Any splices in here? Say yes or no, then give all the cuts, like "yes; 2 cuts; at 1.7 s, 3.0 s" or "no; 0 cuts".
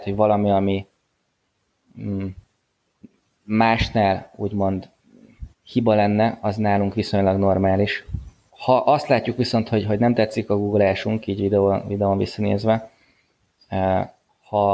yes; 2 cuts; at 5.5 s, 8.5 s